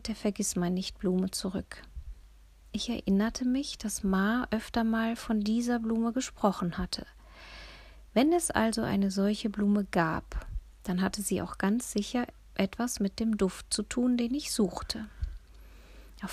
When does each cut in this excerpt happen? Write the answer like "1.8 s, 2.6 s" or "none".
none